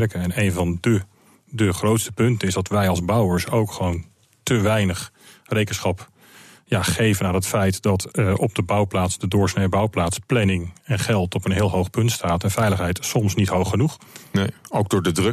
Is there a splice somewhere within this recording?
no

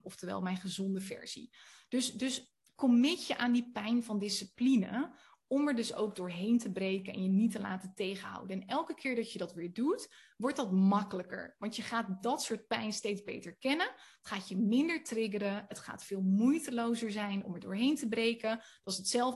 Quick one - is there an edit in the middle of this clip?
no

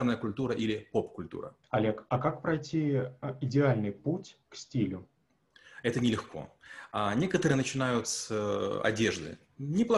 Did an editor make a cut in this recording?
yes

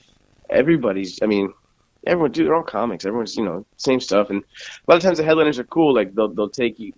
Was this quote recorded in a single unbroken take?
yes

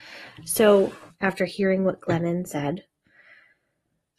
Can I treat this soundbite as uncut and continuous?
no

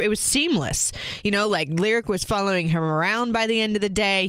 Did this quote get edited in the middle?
no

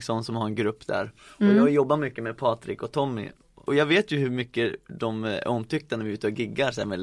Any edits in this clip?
no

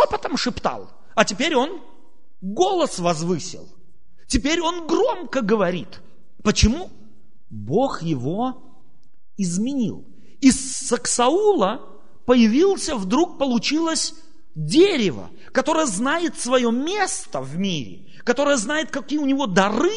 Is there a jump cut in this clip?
no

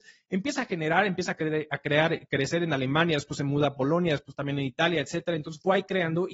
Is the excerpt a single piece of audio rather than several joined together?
yes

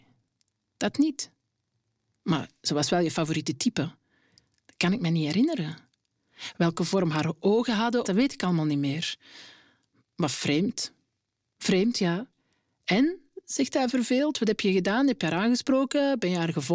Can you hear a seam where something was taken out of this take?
yes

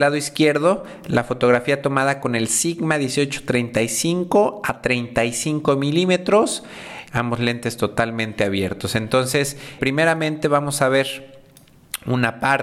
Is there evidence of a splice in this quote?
yes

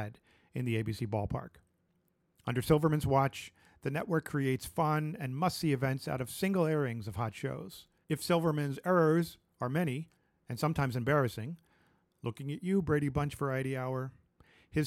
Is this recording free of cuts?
no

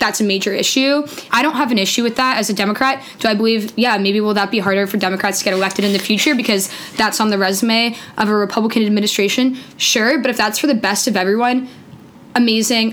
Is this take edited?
yes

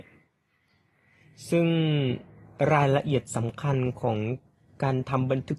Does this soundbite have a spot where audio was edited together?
no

